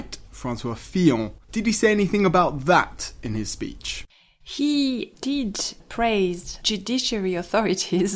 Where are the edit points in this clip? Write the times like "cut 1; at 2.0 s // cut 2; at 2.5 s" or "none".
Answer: cut 1; at 1.4 s